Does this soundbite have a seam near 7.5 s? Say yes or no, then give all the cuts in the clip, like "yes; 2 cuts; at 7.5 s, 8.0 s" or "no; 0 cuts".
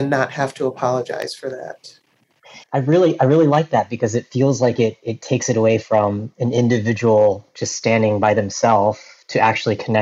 no; 1 cut; at 2.6 s